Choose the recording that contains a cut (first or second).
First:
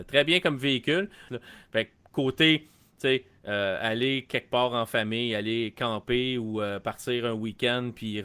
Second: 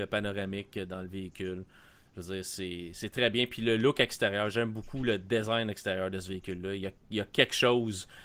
first